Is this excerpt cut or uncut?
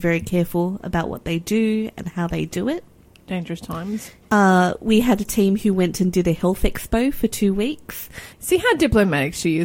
cut